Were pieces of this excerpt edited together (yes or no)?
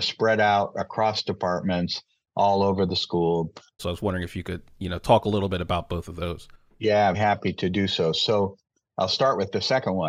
yes